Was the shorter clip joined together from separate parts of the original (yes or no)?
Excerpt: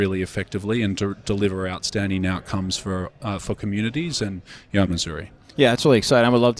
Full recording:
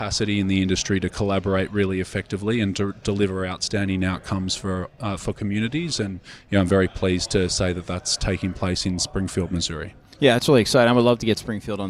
yes